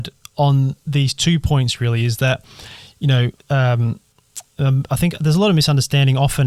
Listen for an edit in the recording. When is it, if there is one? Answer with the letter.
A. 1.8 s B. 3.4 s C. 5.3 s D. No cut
B